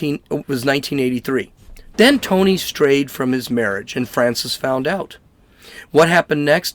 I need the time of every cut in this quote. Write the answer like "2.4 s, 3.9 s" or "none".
1.9 s